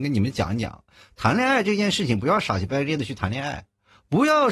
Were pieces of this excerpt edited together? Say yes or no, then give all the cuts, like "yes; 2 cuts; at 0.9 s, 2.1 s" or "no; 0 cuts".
no; 0 cuts